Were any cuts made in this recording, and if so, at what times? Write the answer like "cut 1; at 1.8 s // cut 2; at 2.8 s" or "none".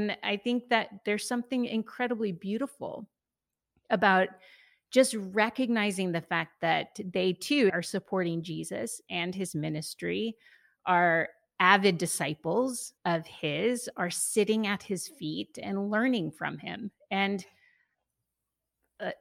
cut 1; at 7.7 s // cut 2; at 13.0 s